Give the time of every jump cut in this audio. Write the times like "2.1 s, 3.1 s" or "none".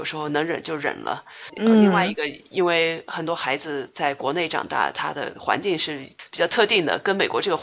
none